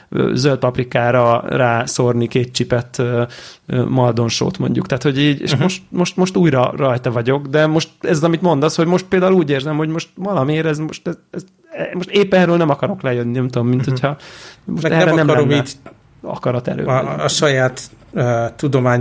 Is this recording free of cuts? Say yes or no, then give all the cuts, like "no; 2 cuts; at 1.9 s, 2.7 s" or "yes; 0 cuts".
yes; 0 cuts